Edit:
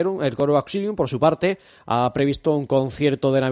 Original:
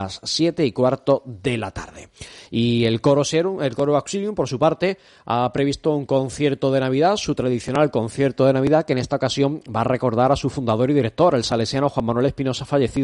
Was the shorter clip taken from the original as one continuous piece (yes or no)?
yes